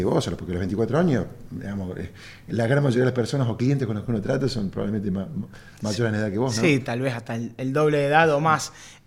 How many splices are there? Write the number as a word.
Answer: zero